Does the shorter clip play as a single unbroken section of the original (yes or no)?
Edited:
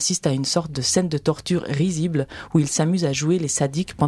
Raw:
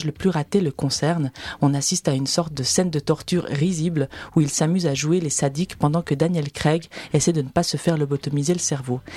yes